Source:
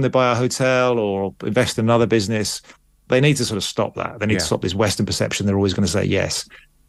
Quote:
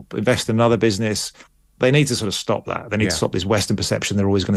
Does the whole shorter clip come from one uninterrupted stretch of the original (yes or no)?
yes